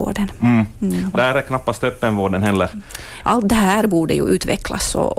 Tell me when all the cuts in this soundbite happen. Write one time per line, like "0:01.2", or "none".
0:01.1
0:03.2